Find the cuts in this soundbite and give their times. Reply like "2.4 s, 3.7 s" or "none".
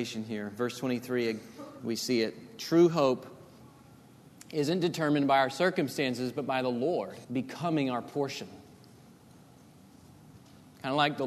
1.8 s, 7.2 s